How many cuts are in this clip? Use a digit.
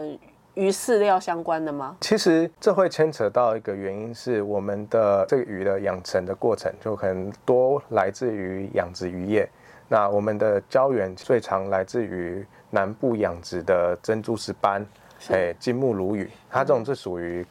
0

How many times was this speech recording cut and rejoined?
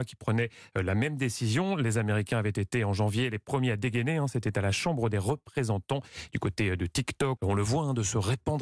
1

